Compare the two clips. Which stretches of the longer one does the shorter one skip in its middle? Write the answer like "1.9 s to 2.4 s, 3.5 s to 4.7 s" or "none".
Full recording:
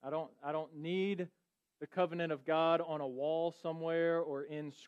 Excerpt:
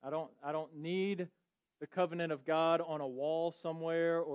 none